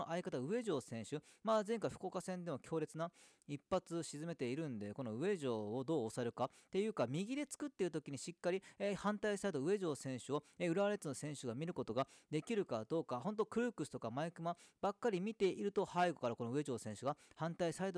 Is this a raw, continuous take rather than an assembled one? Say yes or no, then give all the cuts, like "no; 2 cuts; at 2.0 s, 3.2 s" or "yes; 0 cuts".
yes; 0 cuts